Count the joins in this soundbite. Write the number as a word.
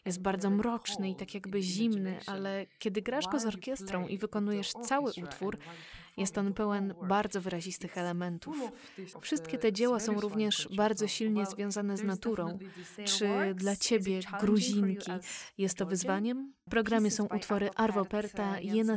three